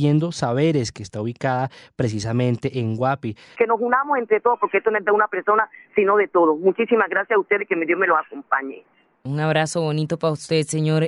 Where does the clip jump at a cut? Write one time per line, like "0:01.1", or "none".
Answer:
0:03.5